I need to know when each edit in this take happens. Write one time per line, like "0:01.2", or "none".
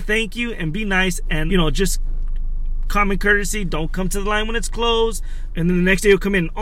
0:01.5
0:05.5